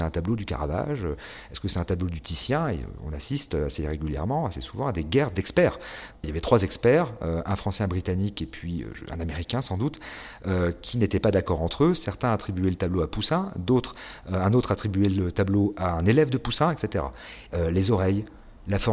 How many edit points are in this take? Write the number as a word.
two